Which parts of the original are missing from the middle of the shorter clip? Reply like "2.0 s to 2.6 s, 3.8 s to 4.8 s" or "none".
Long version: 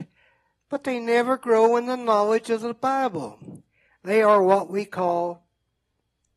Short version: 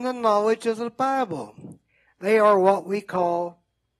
none